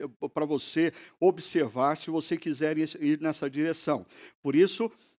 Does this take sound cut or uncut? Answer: uncut